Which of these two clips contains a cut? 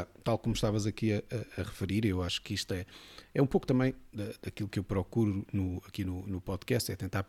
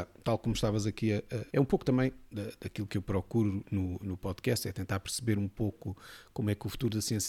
second; 2 cuts; at 1.5 s, 4.0 s

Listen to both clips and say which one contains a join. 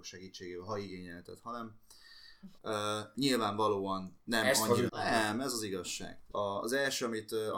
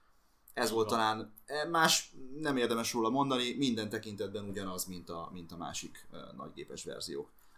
first; 3 cuts; at 2.6 s, 4.9 s, 6.3 s

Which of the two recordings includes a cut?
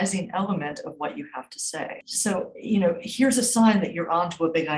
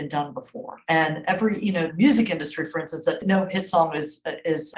second; 1 cut; at 1.9 s

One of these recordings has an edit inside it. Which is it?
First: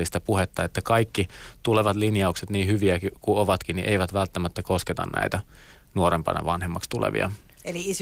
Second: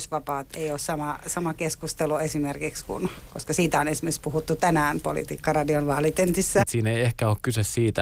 second; 1 cut; at 6.6 s

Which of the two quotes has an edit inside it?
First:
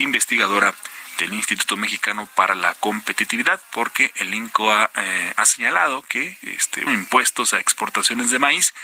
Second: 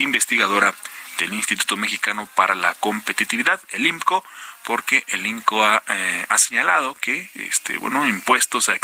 first; 2 cuts; at 3.6 s, 6.9 s

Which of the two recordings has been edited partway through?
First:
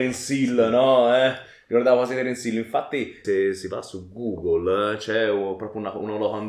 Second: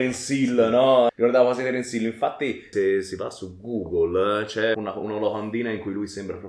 second; 2 cuts; at 1.1 s, 4.7 s

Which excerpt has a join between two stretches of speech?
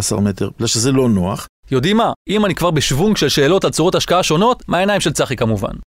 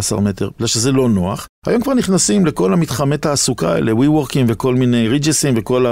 first; 2 cuts; at 1.6 s, 4.7 s

